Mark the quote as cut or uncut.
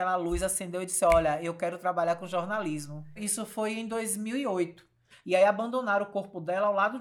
cut